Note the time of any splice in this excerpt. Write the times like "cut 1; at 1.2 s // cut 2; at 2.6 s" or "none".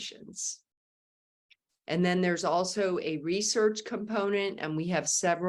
cut 1; at 1.7 s